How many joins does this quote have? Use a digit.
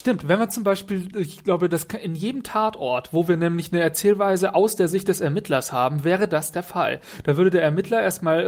0